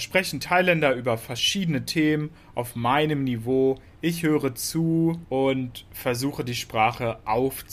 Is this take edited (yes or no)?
no